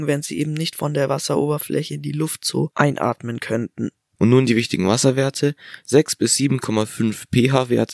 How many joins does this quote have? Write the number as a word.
one